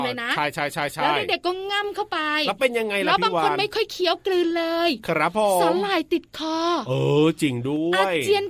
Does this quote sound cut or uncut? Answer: uncut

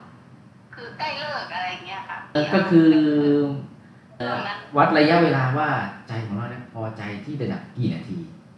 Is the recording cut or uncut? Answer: cut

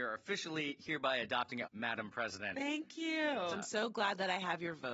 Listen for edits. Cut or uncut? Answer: cut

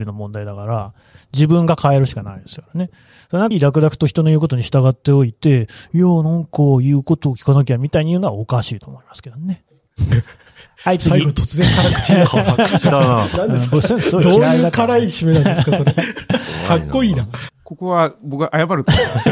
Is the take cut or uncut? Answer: cut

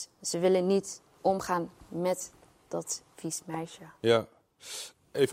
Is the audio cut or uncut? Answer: uncut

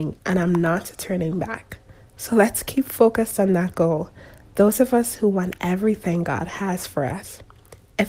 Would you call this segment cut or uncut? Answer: uncut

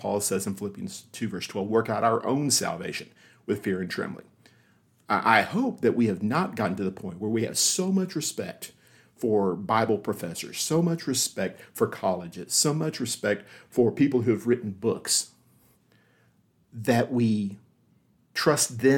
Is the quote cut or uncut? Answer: uncut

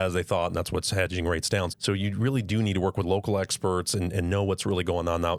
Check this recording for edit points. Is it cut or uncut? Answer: cut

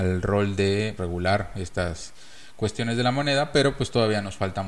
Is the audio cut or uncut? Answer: cut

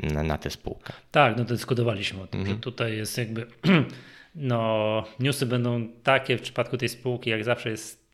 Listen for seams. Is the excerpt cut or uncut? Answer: uncut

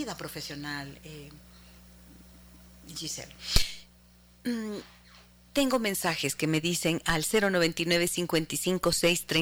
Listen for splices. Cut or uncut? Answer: uncut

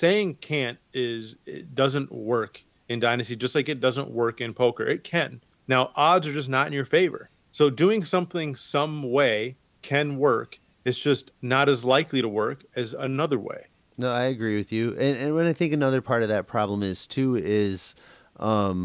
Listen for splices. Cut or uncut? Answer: uncut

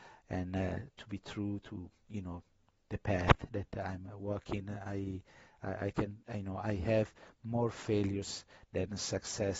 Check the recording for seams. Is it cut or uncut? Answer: uncut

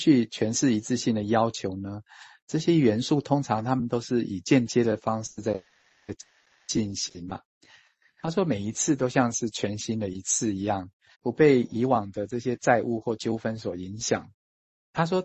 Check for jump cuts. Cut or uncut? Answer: cut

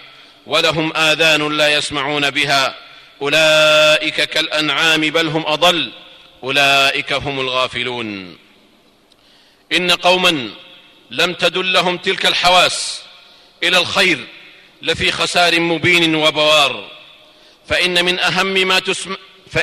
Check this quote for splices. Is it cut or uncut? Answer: uncut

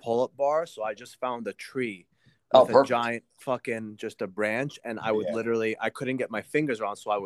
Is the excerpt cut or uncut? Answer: uncut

